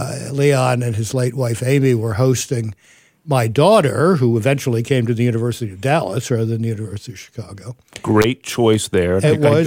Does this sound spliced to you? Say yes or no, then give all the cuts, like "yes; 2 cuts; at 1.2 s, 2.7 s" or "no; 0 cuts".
no; 0 cuts